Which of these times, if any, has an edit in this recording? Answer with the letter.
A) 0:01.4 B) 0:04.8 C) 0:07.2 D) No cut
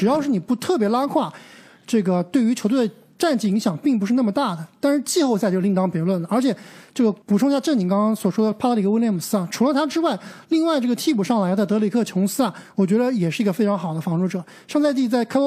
C